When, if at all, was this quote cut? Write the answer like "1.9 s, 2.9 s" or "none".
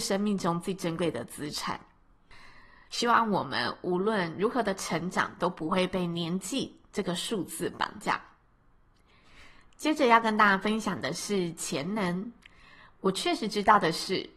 2.9 s